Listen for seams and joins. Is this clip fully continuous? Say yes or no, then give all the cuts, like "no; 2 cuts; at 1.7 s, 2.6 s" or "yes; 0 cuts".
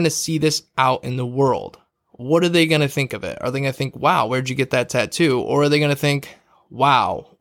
yes; 0 cuts